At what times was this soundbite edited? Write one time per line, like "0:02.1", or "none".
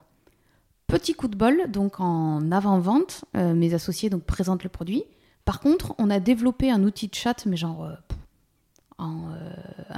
0:05.4